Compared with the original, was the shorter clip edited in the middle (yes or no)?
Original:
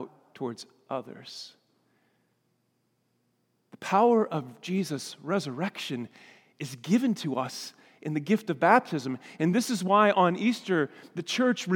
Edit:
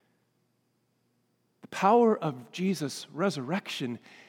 no